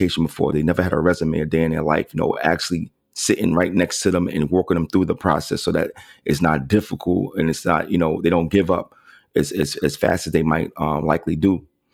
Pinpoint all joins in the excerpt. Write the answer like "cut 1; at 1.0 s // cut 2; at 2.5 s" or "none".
none